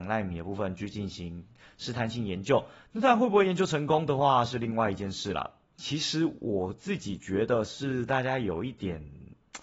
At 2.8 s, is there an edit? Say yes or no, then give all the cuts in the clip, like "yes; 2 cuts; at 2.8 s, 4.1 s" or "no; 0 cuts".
no; 1 cut; at 5.7 s